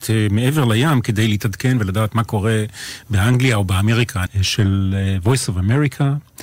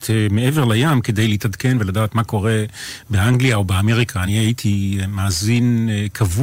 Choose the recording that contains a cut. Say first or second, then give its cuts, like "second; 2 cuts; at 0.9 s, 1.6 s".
first; 1 cut; at 4.3 s